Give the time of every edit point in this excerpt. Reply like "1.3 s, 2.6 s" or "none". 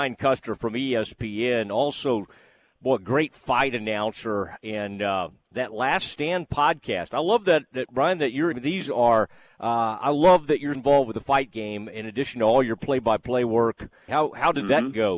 8.5 s, 10.7 s, 14.1 s